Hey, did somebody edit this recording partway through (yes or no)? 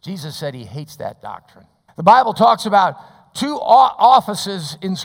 yes